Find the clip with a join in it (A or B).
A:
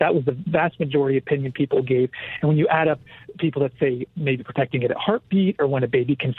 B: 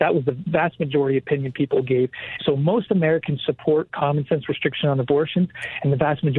B